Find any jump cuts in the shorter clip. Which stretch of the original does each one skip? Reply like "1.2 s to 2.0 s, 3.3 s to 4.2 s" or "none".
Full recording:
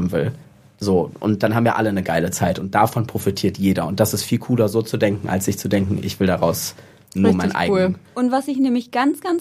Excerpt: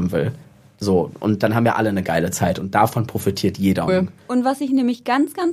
3.9 s to 7.7 s